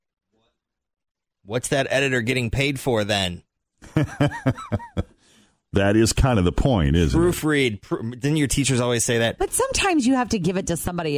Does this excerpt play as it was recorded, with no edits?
no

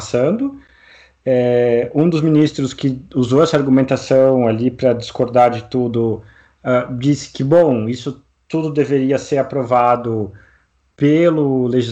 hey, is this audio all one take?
yes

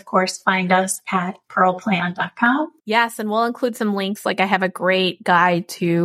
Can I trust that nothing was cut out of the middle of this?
yes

